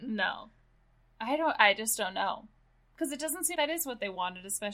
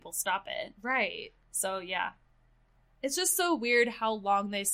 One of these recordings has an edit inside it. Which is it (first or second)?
first